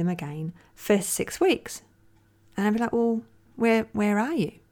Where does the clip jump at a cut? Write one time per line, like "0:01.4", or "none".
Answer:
0:03.5